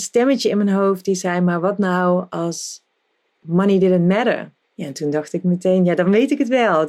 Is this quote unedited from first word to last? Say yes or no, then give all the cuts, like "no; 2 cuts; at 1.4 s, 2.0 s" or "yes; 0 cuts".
no; 1 cut; at 4.6 s